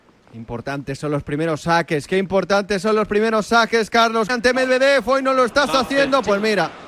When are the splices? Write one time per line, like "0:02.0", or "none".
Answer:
0:04.3